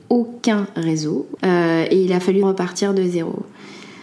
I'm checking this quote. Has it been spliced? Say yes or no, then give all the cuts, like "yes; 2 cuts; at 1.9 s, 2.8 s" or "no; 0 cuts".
yes; 2 cuts; at 1.4 s, 2.4 s